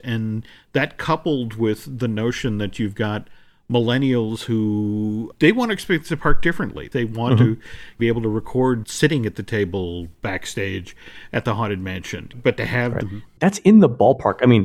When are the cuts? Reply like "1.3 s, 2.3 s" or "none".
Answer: 13.0 s